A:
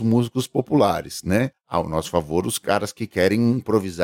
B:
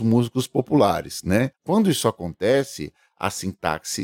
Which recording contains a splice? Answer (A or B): B